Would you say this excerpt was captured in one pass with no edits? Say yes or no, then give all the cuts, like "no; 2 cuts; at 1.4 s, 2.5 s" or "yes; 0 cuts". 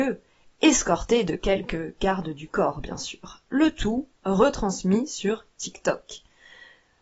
yes; 0 cuts